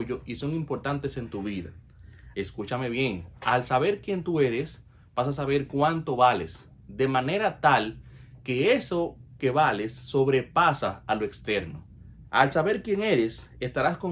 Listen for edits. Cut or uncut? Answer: cut